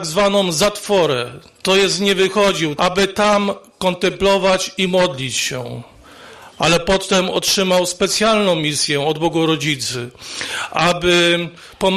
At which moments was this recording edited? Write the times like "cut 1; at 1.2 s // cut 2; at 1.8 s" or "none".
cut 1; at 2.8 s